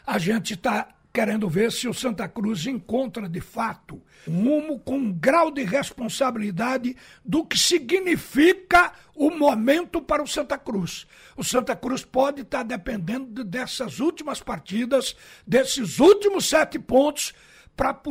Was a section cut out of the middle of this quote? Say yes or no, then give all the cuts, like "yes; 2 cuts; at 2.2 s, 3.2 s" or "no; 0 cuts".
yes; 1 cut; at 4.3 s